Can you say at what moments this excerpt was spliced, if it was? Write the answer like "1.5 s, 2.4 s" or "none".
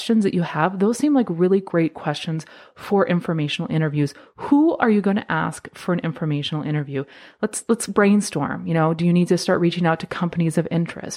none